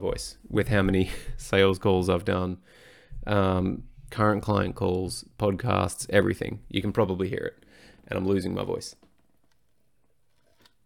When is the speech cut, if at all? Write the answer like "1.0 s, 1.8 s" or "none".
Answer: 4.1 s